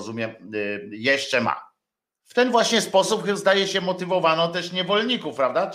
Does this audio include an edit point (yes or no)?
yes